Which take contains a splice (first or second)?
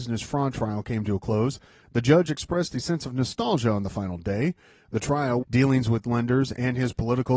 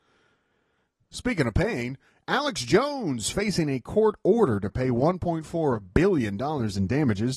first